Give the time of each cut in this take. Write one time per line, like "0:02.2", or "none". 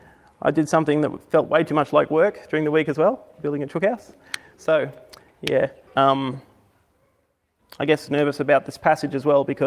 0:05.9